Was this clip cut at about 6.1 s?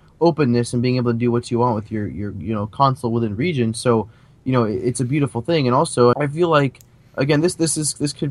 yes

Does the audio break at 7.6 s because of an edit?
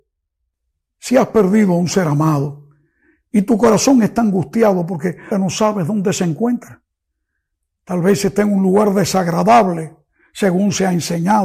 no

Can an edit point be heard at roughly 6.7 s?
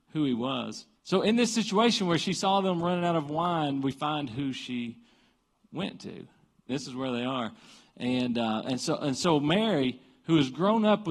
yes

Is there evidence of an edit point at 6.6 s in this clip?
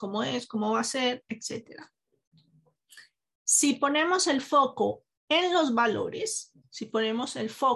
yes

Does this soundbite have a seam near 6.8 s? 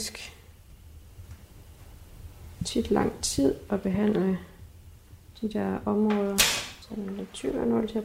yes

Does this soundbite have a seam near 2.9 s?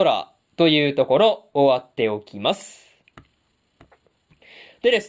no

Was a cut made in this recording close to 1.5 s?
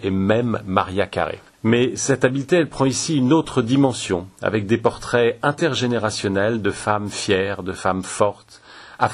yes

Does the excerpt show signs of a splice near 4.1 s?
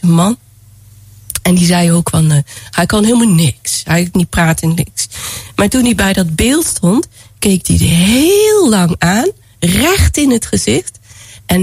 yes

